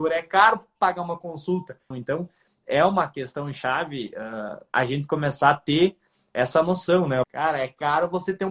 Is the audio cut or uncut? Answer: cut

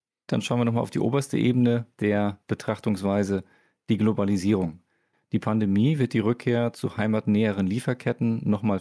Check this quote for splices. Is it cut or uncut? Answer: cut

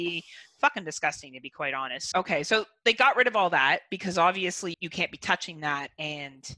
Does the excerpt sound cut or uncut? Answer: cut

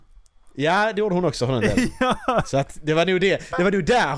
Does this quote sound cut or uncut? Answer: uncut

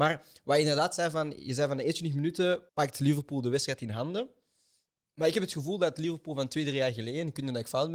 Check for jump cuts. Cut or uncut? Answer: cut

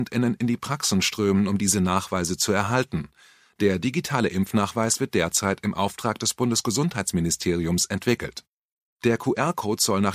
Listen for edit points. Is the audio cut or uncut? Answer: uncut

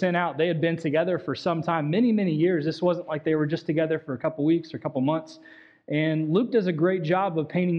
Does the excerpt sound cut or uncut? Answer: uncut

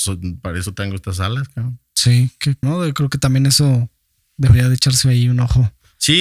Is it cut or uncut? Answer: cut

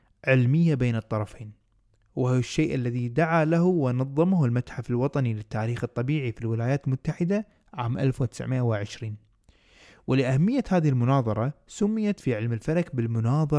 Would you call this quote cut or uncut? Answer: uncut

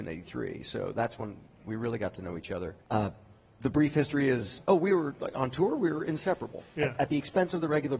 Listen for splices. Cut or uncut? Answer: cut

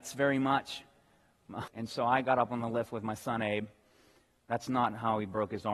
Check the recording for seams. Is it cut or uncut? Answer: cut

